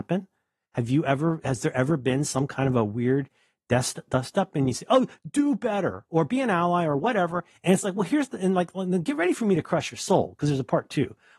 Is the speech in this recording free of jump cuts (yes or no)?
yes